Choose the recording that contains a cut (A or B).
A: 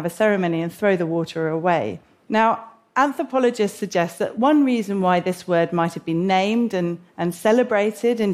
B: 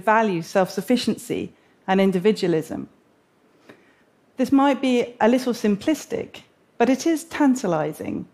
A